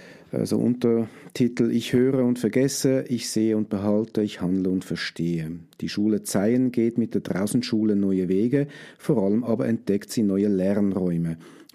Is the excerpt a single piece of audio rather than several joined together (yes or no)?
yes